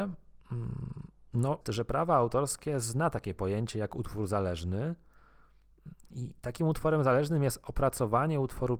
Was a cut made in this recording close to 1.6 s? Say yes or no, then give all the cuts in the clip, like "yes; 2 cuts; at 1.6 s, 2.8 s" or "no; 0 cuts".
yes; 1 cut; at 1.6 s